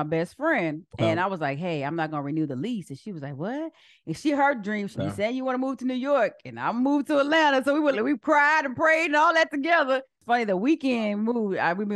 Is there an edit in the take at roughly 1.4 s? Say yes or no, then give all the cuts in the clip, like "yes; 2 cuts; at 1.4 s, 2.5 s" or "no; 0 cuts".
no; 2 cuts; at 4.9 s, 7.9 s